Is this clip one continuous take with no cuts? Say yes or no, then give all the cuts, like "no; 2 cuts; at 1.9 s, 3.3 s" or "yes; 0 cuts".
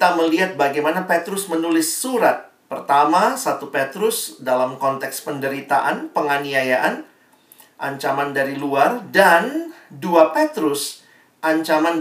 yes; 0 cuts